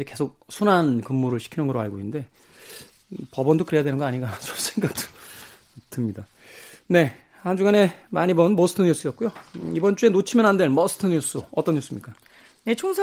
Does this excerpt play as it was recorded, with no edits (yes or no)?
yes